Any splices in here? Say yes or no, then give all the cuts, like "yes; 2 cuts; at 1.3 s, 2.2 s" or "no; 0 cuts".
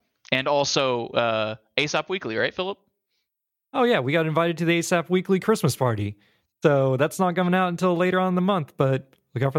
no; 0 cuts